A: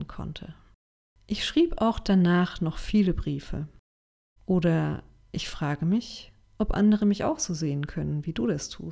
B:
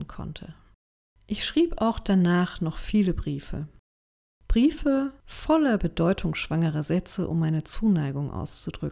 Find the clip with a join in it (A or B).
A